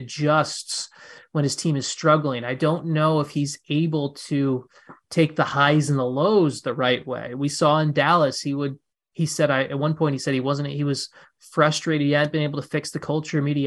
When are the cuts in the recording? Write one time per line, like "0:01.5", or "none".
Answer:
none